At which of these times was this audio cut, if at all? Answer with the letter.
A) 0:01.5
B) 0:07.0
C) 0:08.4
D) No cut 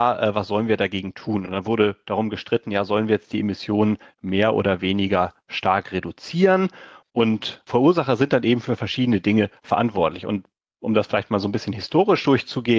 B